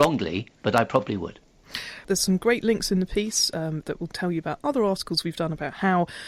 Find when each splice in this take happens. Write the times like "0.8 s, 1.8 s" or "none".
2.0 s